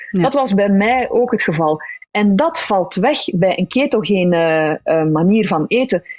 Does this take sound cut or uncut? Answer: uncut